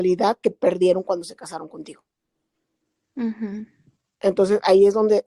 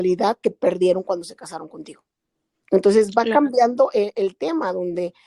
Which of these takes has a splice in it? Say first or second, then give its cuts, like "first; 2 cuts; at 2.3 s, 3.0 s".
second; 1 cut; at 2.6 s